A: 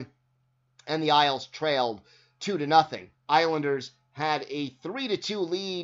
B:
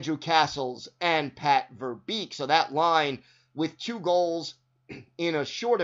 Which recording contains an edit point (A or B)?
A